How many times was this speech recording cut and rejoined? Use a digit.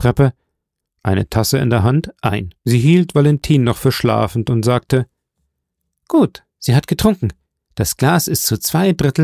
2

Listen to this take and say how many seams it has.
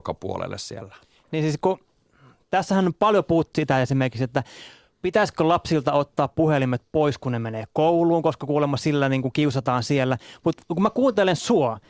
1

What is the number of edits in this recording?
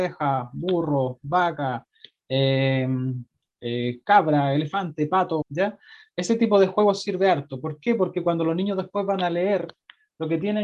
1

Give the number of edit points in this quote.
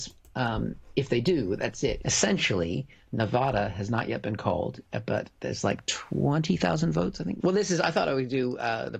2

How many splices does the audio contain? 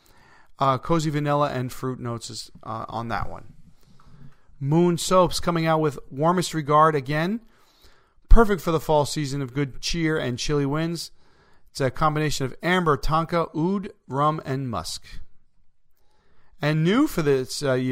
0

